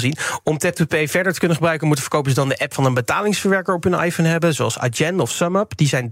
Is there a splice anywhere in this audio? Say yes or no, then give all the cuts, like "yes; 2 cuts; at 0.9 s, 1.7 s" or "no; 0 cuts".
no; 0 cuts